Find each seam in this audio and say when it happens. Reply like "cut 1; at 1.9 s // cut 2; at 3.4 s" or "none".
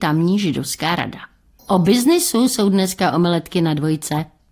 cut 1; at 1.6 s